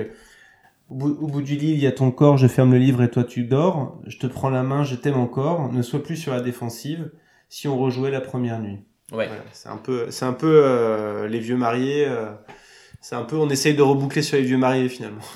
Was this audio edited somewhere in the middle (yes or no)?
no